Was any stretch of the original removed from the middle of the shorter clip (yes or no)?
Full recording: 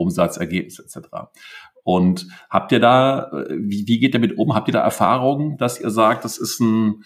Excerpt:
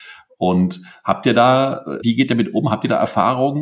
yes